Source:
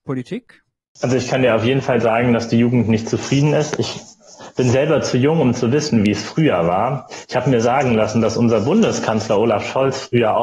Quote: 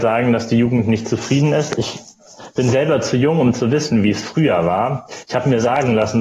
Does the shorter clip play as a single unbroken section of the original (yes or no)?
yes